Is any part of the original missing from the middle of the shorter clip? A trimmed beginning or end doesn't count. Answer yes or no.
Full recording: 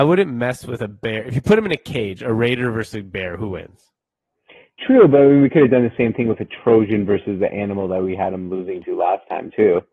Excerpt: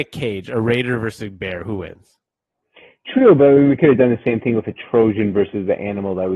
no